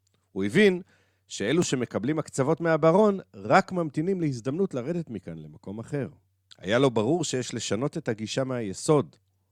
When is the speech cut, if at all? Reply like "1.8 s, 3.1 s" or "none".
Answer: 6.5 s